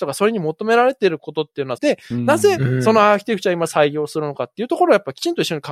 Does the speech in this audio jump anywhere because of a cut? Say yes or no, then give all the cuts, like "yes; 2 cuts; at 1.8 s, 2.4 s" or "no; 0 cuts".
yes; 1 cut; at 1.8 s